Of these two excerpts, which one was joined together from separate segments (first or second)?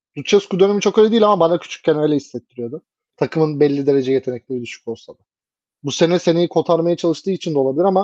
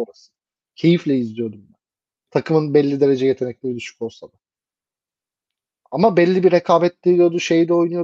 first